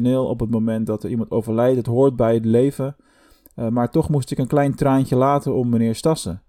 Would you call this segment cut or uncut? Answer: uncut